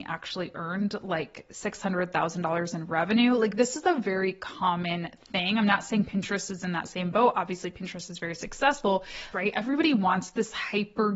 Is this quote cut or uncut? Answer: cut